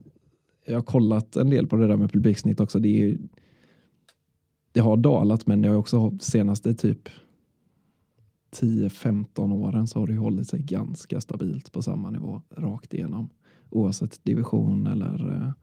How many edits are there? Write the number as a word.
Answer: one